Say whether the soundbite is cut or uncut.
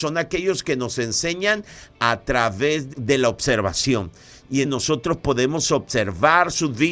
cut